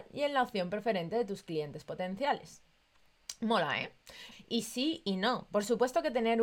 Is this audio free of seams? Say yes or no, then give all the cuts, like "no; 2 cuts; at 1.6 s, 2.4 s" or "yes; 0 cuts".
no; 1 cut; at 4.3 s